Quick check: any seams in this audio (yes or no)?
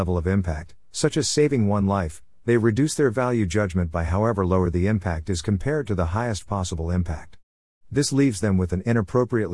no